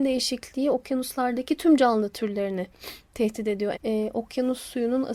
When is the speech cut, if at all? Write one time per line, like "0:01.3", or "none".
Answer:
0:03.7